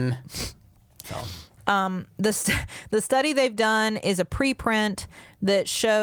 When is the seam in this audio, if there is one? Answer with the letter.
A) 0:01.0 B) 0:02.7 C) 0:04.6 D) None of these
A